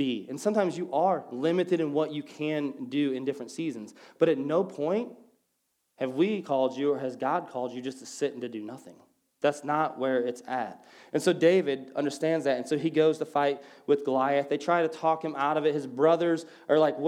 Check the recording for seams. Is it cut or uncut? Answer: uncut